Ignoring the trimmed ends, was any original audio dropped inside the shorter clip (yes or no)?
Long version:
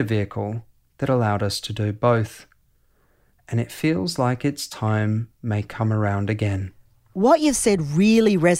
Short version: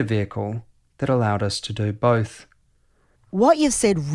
yes